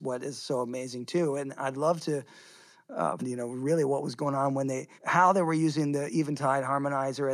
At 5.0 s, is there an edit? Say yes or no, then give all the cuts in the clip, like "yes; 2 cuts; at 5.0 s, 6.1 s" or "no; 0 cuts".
yes; 2 cuts; at 3.2 s, 5.0 s